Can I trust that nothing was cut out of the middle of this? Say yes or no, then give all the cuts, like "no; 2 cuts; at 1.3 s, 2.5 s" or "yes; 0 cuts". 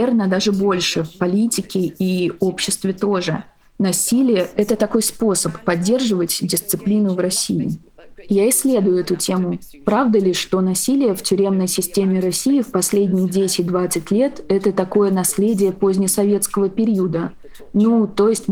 yes; 0 cuts